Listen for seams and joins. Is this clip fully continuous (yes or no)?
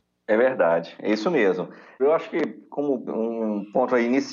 no